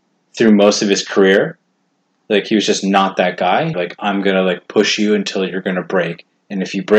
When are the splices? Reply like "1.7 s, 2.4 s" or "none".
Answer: 3.7 s